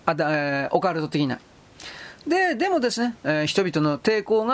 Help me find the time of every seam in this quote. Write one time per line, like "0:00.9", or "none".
0:03.2